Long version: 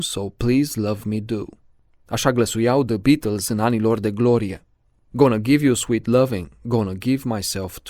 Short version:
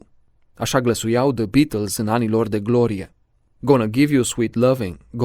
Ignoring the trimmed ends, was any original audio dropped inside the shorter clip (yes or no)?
no